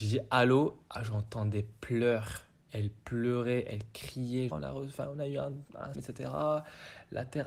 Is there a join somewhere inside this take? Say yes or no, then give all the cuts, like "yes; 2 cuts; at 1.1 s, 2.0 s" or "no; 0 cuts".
yes; 3 cuts; at 2.6 s, 4.5 s, 5.9 s